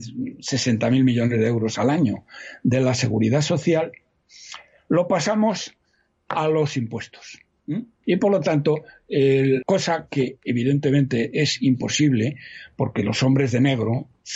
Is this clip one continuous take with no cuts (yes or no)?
no